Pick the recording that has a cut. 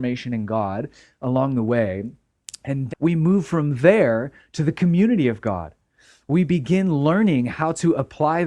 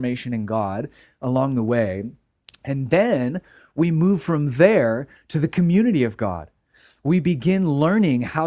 first; 1 cut; at 2.9 s

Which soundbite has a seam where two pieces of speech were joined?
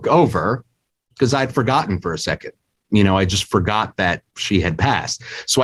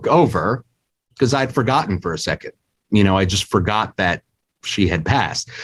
first; 1 cut; at 4.3 s

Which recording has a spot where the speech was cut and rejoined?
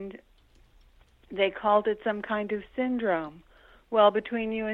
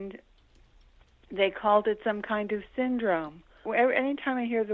second; 1 cut; at 3.7 s

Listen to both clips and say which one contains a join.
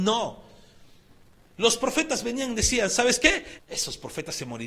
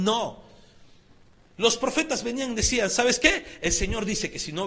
first; 1 cut; at 3.6 s

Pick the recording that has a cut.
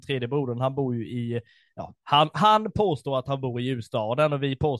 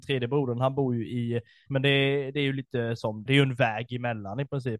second; 2 cuts; at 1.7 s, 3.3 s

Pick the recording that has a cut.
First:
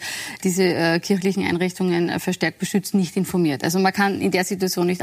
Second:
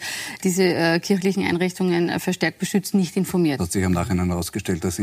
second; 1 cut; at 3.6 s

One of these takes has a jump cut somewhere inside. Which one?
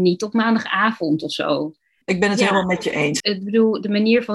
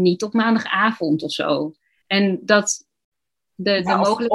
first; 2 cuts; at 2.0 s, 3.2 s

